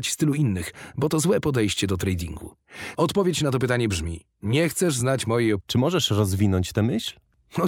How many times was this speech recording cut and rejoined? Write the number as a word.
two